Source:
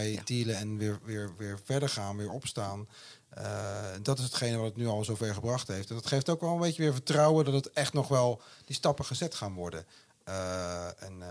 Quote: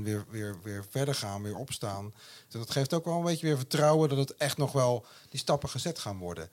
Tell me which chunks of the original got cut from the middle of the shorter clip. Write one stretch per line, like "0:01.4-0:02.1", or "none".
0:03.2-0:05.9